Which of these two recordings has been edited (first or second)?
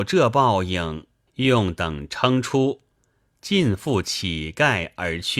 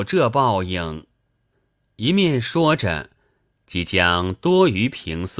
first